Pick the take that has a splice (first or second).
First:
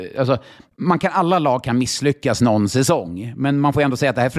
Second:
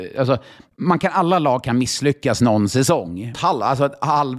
second